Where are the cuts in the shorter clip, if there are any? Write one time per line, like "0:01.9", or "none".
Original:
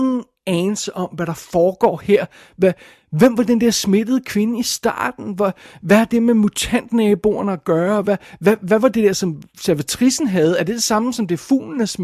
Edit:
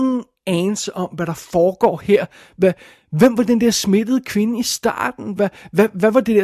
0:05.4

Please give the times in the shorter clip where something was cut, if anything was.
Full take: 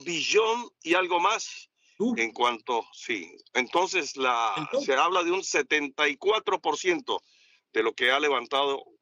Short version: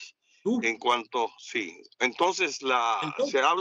none

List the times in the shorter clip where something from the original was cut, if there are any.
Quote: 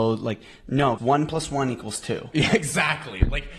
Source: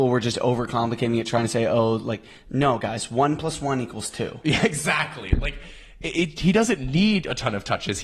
0:01.0

